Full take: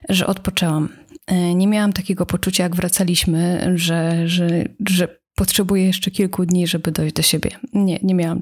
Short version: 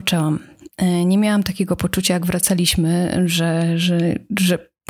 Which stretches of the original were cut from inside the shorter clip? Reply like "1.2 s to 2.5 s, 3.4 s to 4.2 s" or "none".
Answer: none